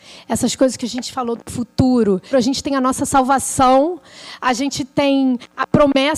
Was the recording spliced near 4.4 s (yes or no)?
no